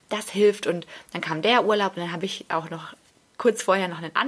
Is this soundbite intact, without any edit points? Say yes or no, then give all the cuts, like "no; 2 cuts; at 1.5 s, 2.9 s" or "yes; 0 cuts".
yes; 0 cuts